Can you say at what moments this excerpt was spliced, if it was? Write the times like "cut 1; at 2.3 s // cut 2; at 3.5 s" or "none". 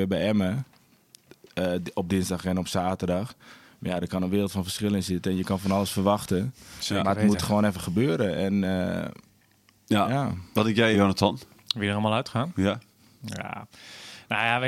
cut 1; at 10.9 s

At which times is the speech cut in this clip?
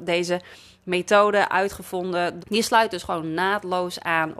cut 1; at 2.4 s

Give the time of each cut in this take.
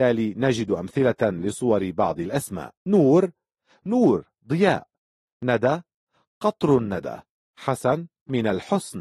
cut 1; at 2.8 s

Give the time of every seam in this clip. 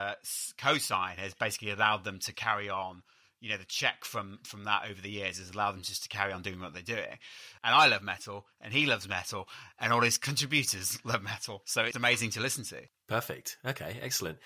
cut 1; at 2.3 s // cut 2; at 7.6 s // cut 3; at 11.9 s

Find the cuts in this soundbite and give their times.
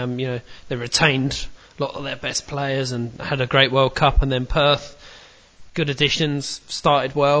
none

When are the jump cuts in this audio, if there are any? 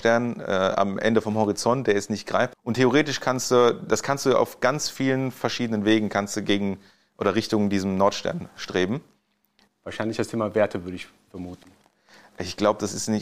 cut 1; at 2.5 s // cut 2; at 9.7 s

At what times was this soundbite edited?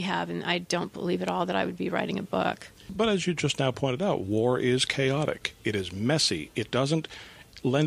none

